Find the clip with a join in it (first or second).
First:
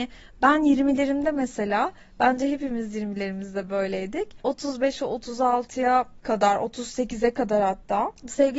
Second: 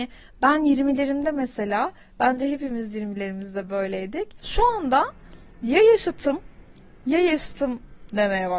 second